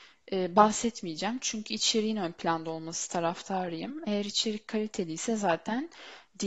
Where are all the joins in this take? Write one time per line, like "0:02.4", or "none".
none